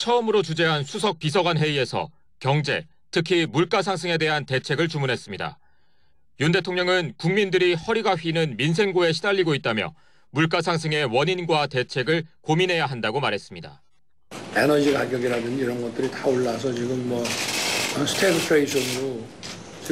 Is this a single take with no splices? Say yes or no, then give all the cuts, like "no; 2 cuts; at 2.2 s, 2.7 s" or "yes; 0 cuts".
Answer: yes; 0 cuts